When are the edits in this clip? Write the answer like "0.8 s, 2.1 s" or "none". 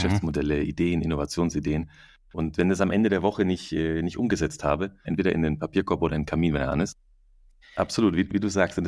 5.0 s, 7.6 s